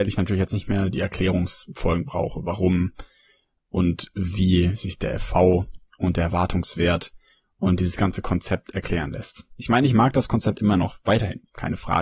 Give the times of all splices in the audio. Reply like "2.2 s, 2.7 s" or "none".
none